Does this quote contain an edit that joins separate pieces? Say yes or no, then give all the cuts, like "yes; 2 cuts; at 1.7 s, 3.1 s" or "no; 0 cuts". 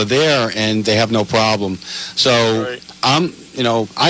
no; 0 cuts